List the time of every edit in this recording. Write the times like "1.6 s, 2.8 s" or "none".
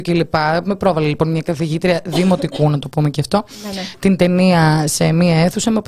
none